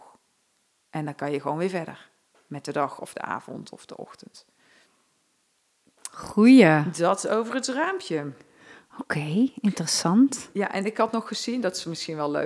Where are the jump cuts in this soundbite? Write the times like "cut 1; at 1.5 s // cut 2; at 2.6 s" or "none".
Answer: none